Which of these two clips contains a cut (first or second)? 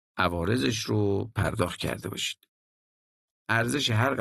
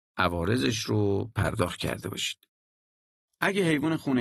first